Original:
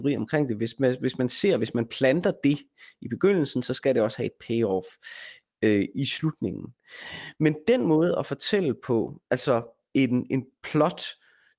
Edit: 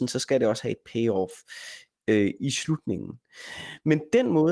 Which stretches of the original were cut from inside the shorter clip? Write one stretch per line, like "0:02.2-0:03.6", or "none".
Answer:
none